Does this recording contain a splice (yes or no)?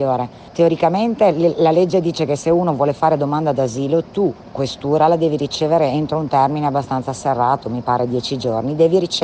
no